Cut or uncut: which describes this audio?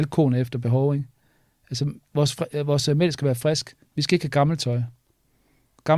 uncut